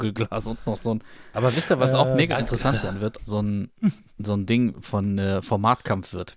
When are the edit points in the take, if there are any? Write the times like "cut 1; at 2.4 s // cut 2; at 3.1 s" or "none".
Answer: cut 1; at 1.3 s // cut 2; at 3.2 s